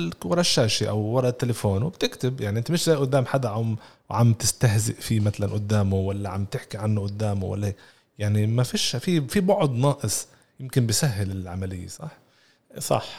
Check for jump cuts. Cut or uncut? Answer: uncut